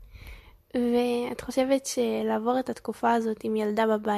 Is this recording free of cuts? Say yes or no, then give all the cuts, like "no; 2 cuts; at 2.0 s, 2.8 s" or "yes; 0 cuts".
yes; 0 cuts